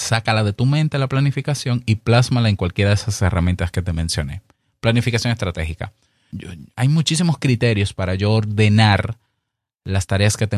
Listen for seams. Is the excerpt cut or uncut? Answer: cut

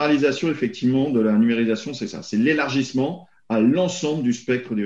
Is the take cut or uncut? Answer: uncut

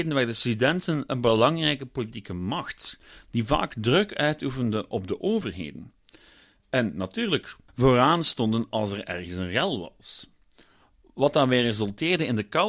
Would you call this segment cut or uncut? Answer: cut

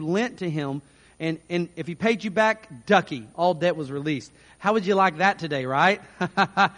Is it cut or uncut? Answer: cut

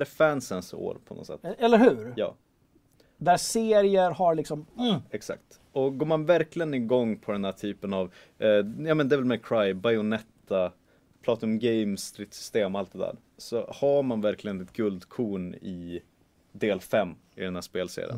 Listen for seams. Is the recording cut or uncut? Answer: uncut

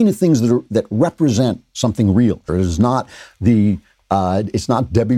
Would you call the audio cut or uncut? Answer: cut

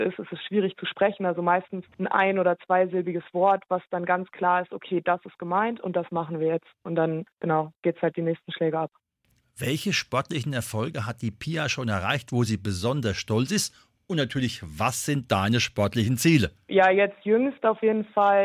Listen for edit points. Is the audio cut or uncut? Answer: uncut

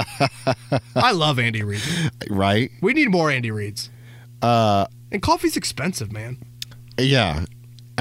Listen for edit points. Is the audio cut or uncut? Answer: uncut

